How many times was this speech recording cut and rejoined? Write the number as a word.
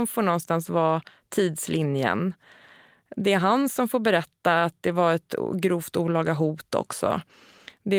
zero